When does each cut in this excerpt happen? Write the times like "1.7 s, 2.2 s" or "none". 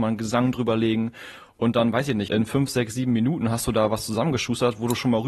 2.3 s